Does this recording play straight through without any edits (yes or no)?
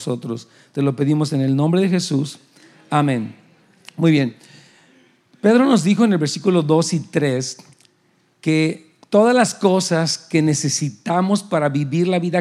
yes